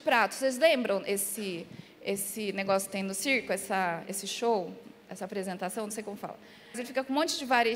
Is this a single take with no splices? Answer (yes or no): no